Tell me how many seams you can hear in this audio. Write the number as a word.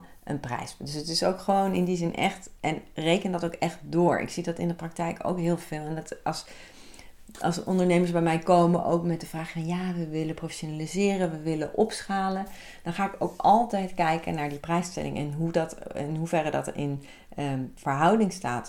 zero